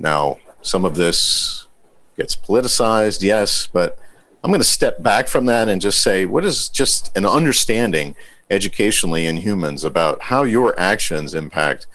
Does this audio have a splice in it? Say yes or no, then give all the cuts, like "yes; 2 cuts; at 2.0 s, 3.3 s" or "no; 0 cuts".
no; 0 cuts